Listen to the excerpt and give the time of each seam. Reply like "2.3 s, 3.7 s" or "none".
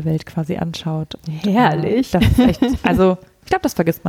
none

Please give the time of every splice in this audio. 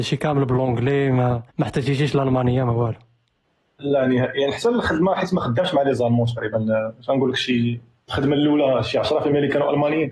1.5 s

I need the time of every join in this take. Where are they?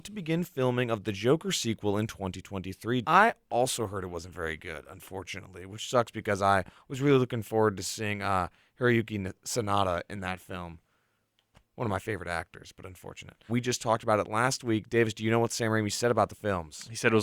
3.0 s, 13.5 s

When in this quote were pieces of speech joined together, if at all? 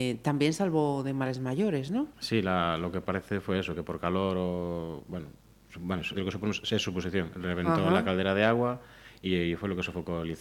6.1 s

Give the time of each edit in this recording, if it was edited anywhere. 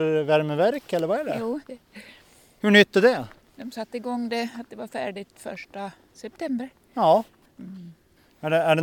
7.5 s

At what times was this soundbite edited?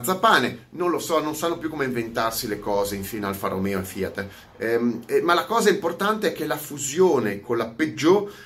none

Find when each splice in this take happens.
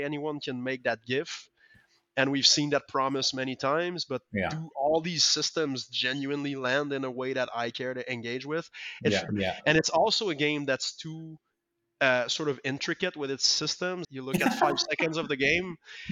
9.3 s, 14.0 s

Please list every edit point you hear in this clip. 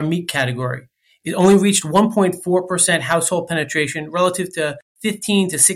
none

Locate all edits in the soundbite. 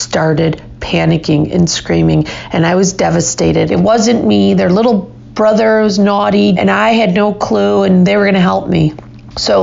3.7 s, 6.5 s

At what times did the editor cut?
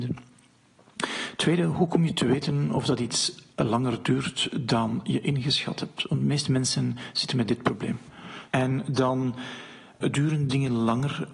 3.5 s, 8.5 s, 10.0 s

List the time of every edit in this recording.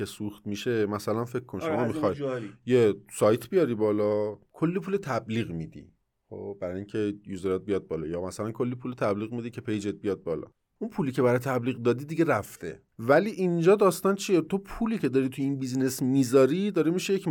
12.9 s

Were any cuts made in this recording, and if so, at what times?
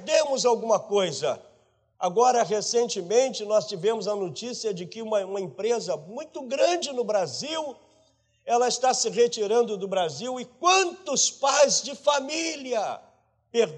1.9 s

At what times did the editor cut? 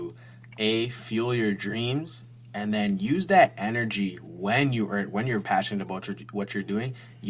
5.4 s

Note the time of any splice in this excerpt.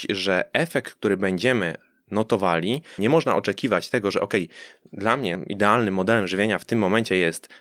3.0 s

